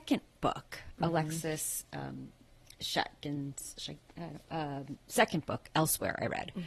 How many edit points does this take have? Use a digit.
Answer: 0